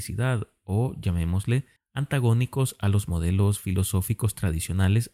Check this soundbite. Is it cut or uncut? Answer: cut